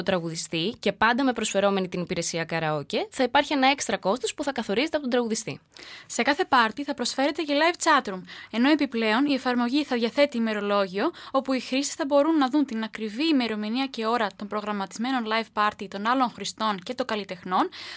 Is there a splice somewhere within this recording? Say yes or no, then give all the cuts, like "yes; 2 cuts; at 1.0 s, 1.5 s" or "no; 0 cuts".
no; 0 cuts